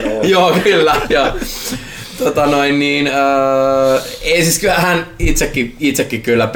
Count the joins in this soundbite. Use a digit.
0